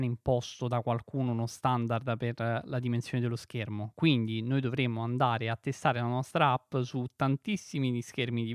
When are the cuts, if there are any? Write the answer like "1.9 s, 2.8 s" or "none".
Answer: none